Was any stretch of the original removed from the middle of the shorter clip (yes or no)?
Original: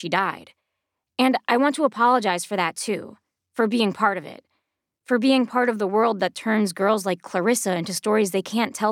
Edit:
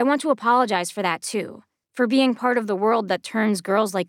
yes